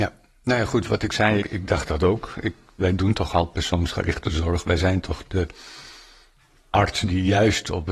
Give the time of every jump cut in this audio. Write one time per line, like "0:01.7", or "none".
0:01.4